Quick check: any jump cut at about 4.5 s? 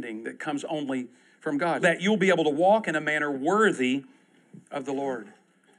no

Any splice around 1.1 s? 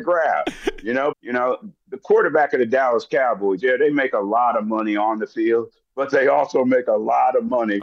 yes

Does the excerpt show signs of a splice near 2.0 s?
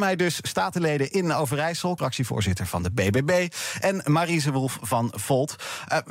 yes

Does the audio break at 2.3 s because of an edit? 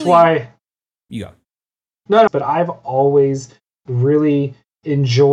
yes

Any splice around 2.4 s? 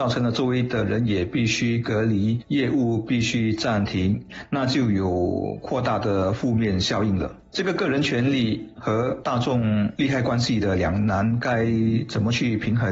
no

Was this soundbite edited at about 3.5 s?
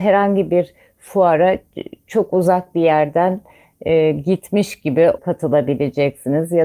no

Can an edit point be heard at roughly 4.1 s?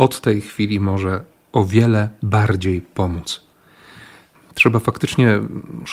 no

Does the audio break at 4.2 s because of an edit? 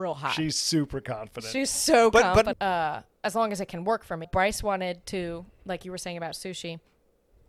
yes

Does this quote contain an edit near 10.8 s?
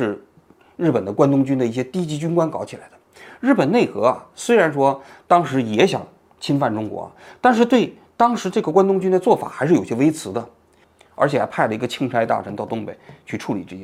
yes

